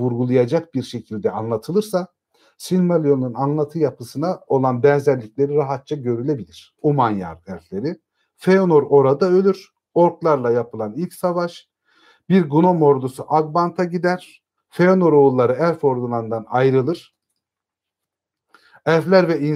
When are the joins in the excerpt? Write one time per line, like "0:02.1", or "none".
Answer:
0:06.8
0:14.6